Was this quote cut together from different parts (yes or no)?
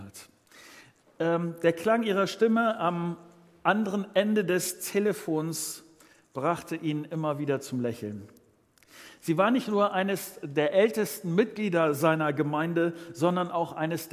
no